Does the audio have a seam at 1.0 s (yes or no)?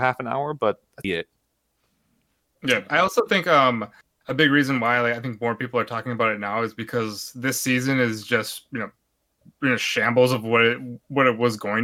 yes